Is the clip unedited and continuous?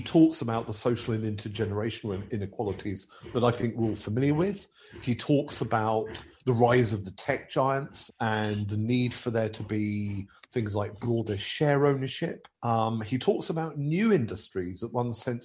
no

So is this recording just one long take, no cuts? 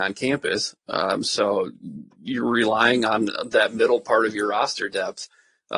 yes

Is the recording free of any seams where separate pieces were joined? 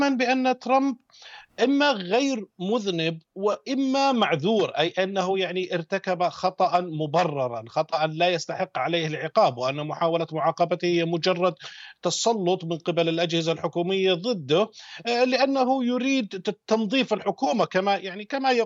no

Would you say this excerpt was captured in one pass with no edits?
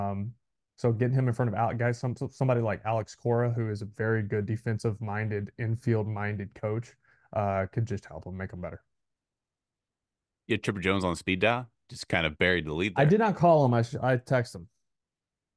yes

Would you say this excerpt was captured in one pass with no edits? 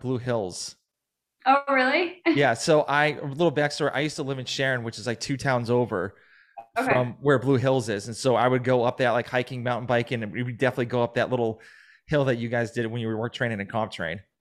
yes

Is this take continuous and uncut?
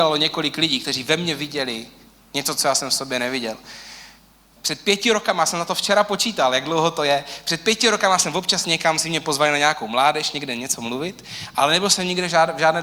no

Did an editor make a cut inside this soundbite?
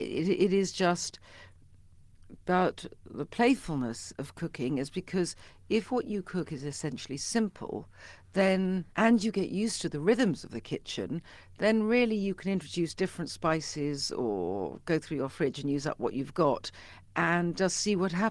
yes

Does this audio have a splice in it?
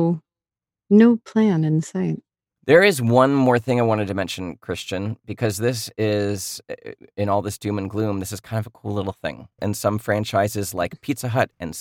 yes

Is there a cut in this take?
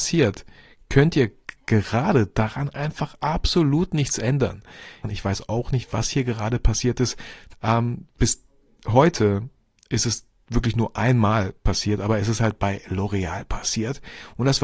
yes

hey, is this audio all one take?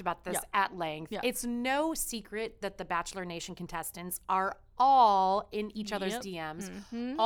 yes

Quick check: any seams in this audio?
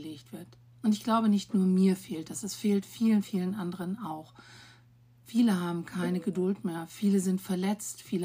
no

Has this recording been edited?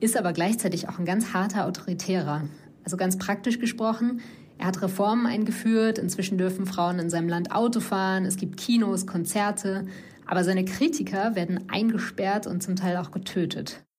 no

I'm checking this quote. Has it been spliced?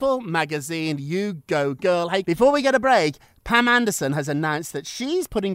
yes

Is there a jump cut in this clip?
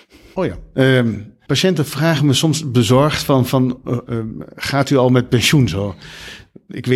yes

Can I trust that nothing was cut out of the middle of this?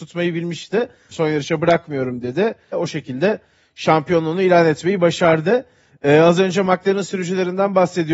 no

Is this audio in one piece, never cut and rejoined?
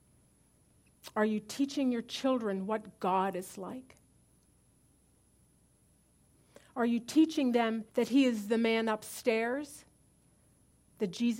no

